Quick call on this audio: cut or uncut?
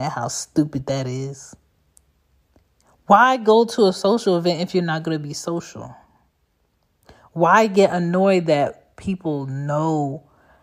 uncut